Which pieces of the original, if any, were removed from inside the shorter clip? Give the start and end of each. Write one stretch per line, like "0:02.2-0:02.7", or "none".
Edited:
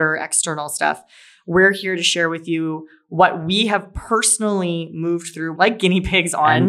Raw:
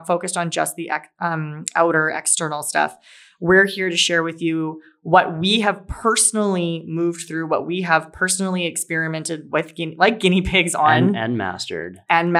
0:07.5-0:10.0